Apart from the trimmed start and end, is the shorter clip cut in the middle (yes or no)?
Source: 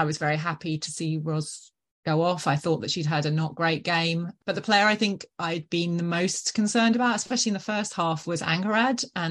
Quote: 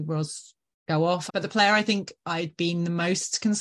yes